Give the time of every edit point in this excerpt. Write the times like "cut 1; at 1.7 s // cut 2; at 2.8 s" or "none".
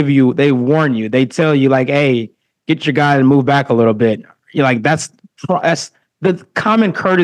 none